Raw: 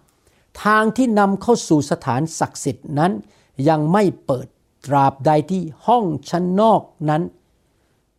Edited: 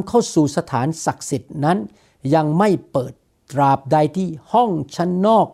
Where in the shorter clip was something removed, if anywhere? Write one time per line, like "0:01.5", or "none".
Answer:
none